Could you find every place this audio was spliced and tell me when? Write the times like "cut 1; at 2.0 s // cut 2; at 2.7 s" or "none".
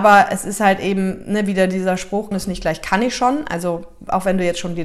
cut 1; at 2.3 s